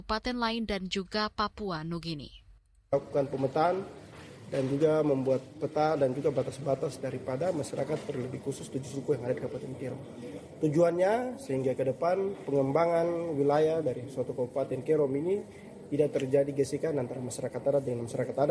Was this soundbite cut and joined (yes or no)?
no